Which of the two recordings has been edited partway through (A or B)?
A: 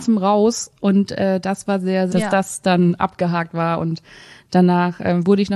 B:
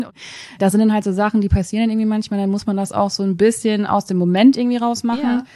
A